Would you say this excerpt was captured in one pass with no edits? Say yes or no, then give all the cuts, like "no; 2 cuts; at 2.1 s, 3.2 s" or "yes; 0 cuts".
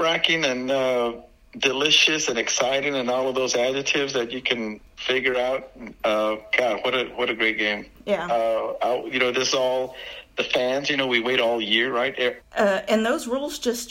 no; 1 cut; at 12.4 s